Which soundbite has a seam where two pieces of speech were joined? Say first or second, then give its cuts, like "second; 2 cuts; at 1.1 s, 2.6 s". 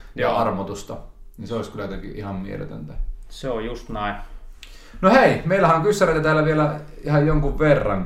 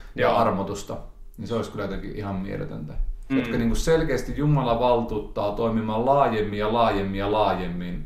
second; 1 cut; at 3.3 s